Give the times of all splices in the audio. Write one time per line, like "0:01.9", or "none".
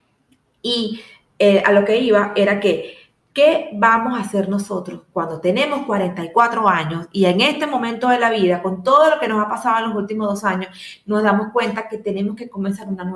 none